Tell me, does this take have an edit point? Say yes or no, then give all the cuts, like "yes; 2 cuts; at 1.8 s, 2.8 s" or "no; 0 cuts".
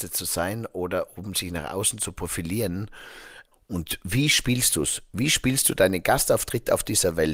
yes; 1 cut; at 3.5 s